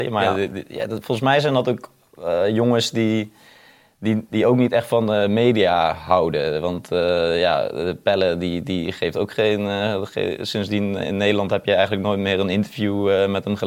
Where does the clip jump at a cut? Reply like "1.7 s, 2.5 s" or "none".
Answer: none